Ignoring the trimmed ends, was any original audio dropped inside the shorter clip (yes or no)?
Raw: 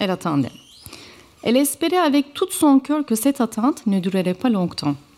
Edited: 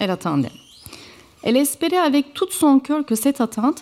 no